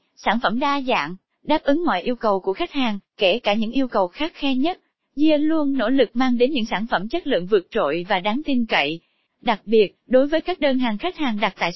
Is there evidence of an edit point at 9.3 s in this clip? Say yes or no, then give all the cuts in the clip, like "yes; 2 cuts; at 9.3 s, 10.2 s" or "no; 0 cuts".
yes; 1 cut; at 9.3 s